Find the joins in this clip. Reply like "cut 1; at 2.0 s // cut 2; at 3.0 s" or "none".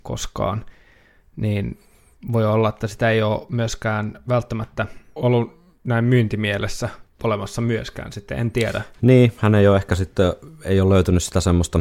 cut 1; at 5.2 s